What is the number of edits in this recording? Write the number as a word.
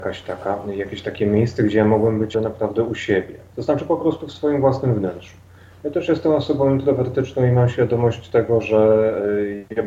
one